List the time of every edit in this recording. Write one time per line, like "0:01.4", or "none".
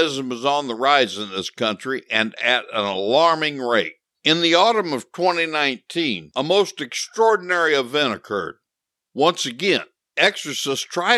0:04.1
0:09.1